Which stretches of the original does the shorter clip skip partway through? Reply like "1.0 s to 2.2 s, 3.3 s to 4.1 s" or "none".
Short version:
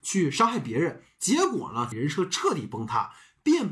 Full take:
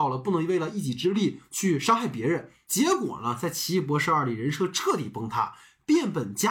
3.4 s to 4.3 s